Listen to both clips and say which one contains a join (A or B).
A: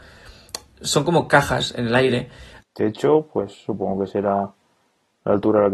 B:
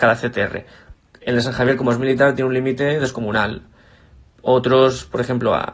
A